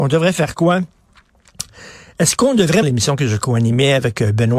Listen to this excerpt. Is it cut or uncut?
cut